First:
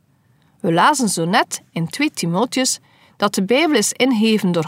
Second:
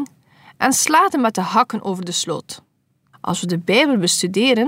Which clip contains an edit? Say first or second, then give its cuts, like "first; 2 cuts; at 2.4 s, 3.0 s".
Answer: second; 1 cut; at 3.1 s